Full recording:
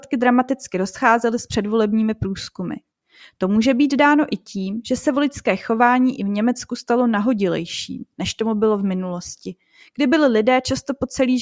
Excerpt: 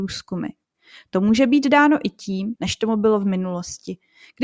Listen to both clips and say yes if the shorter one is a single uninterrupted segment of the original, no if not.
no